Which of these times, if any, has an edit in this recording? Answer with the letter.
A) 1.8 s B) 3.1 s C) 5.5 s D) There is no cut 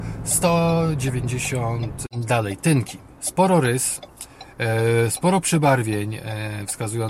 D